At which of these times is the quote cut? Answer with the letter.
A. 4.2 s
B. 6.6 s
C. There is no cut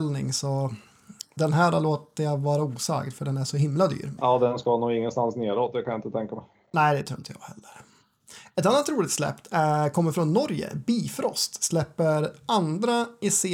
A